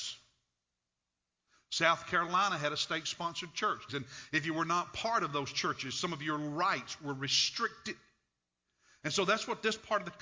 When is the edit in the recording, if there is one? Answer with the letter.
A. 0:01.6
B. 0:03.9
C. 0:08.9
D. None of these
B